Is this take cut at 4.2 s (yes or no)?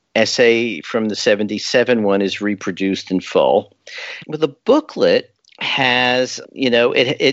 yes